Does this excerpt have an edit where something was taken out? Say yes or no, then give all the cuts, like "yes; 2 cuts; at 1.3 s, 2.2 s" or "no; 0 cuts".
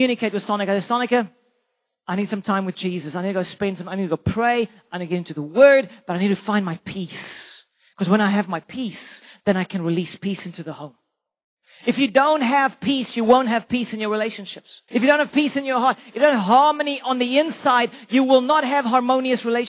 yes; 1 cut; at 14.9 s